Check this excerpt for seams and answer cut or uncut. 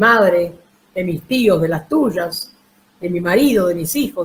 uncut